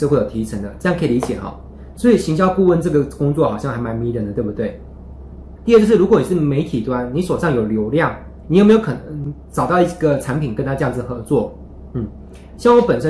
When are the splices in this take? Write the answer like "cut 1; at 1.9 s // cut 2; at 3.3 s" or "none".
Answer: cut 1; at 5.6 s // cut 2; at 8.4 s